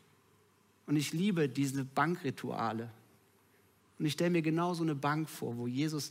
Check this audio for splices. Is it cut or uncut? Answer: cut